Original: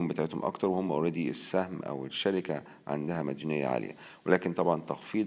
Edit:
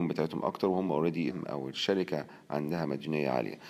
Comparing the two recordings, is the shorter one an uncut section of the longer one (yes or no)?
no